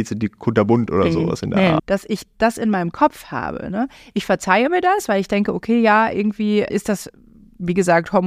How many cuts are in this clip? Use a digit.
2